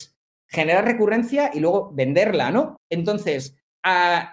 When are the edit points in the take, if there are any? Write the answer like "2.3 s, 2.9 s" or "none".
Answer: 2.7 s

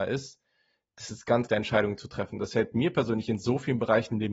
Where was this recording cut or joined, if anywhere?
1.5 s

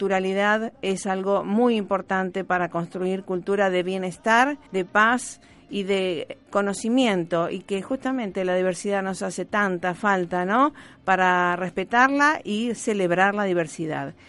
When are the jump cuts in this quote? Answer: 4.7 s

